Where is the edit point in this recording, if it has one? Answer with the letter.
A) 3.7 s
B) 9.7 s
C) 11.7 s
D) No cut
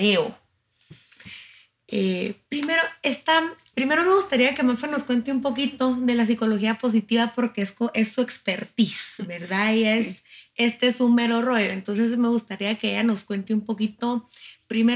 A